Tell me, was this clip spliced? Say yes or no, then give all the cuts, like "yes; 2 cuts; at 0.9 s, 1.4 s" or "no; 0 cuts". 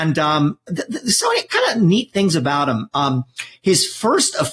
no; 0 cuts